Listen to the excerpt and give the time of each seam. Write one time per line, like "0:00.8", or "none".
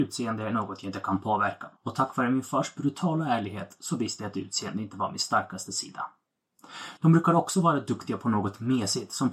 0:01.8
0:07.0

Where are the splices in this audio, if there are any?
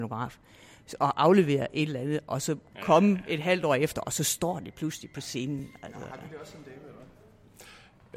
none

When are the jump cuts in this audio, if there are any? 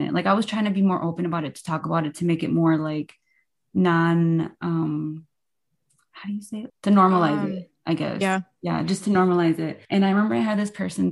0:06.7
0:09.9

